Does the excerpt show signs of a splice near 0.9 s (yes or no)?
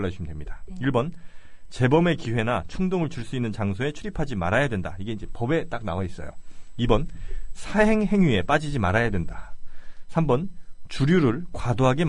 no